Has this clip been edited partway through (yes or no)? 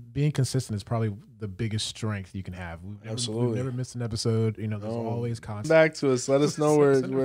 yes